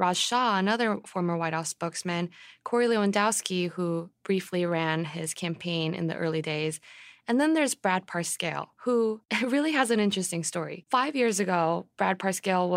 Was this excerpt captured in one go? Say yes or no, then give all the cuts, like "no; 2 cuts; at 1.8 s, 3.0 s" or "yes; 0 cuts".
no; 1 cut; at 8.8 s